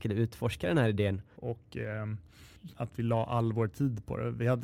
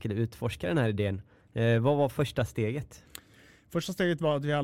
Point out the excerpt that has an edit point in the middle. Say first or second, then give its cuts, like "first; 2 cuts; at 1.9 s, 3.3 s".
first; 2 cuts; at 1.4 s, 2.7 s